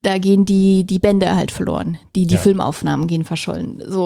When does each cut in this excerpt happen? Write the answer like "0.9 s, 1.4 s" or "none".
none